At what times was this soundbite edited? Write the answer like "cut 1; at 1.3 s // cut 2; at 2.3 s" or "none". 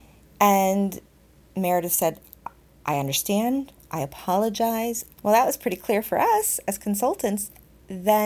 cut 1; at 5.1 s